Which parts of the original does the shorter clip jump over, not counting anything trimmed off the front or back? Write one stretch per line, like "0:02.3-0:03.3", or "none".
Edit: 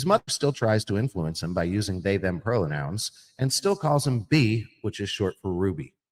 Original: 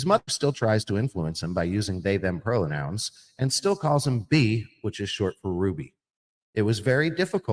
none